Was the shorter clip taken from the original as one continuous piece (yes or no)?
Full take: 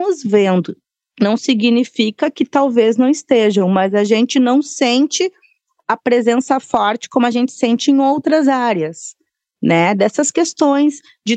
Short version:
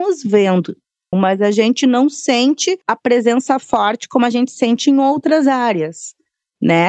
no